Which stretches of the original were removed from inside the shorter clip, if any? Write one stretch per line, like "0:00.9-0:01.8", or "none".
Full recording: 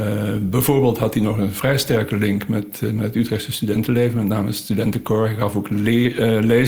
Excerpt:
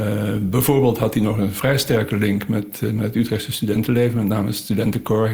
none